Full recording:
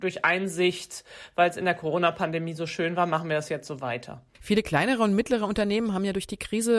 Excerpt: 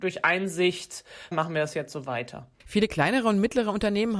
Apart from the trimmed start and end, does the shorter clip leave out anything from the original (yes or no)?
yes